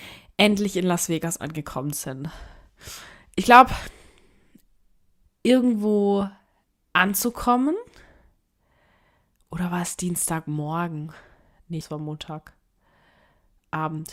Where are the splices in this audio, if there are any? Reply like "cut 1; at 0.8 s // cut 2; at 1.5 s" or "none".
cut 1; at 5.2 s // cut 2; at 11.8 s